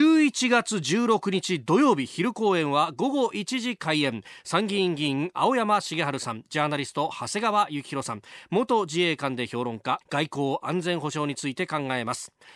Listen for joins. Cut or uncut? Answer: cut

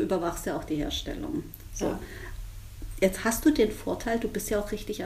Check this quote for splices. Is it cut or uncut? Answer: uncut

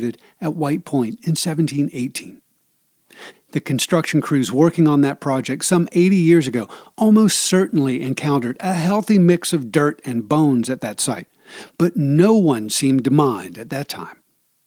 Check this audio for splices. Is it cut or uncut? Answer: cut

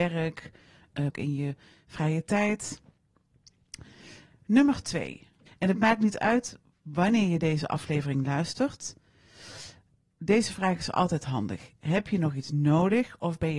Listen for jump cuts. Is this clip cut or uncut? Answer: cut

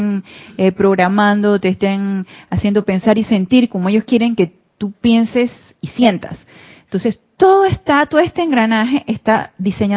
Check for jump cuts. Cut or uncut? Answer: uncut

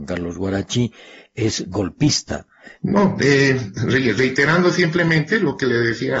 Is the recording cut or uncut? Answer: cut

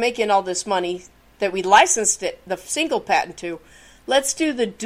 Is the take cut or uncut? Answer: uncut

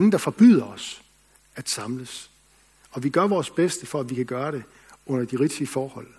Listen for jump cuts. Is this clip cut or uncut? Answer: uncut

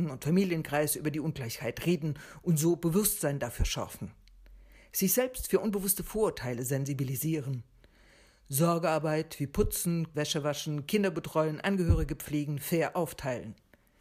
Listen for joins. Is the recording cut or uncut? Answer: cut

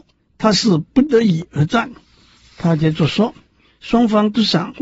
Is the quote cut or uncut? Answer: cut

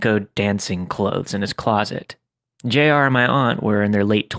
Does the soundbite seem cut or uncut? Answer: cut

